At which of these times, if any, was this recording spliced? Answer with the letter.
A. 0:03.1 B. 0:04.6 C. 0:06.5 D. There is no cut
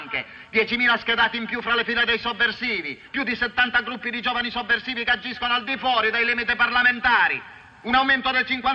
A